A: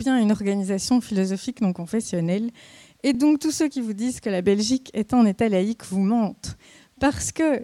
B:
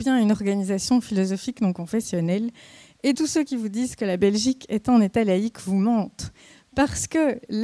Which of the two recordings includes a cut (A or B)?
B